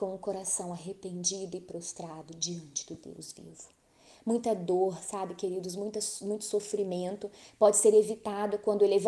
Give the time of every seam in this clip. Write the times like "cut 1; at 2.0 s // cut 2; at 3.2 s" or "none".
none